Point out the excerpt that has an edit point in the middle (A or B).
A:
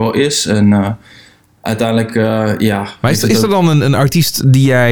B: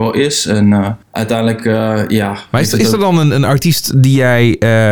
B